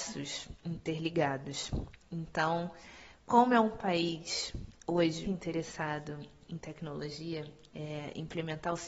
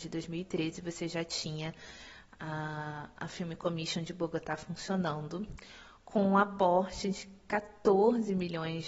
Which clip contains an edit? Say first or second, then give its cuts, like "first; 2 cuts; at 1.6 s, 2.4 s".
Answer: first; 2 cuts; at 5.2 s, 7.7 s